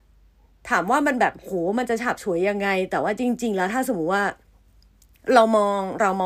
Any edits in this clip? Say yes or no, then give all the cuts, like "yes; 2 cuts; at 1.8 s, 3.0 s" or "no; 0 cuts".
no; 0 cuts